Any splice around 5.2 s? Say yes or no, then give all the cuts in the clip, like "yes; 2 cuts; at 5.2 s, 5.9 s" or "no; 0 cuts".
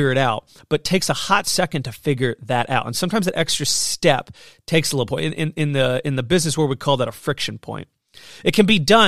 no; 0 cuts